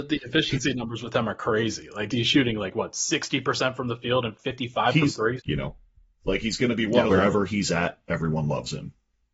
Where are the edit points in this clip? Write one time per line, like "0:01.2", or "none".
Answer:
0:02.1
0:05.4
0:07.1